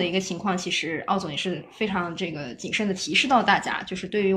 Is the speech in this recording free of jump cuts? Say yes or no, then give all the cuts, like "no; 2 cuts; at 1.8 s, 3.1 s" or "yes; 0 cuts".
yes; 0 cuts